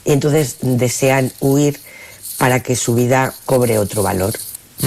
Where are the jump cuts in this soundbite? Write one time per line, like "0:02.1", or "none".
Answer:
0:03.5